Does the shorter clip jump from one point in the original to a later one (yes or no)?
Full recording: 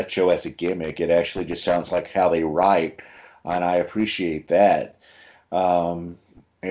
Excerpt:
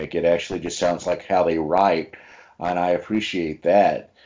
no